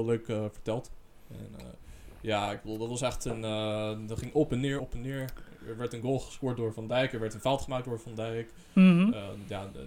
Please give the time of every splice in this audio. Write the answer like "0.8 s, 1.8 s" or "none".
4.8 s